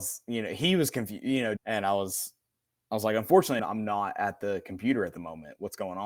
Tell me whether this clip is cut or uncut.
cut